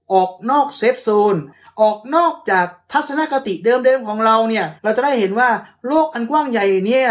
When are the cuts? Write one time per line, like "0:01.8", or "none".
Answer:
0:04.8